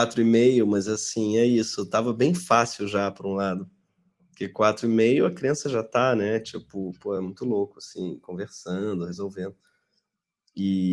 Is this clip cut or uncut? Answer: uncut